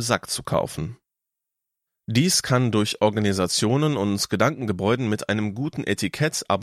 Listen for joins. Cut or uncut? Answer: uncut